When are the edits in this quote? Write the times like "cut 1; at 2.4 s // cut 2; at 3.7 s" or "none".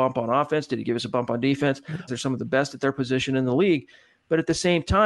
cut 1; at 2.1 s